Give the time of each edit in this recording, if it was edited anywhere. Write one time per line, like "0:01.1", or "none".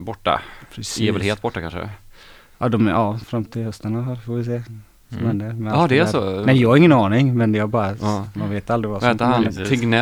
none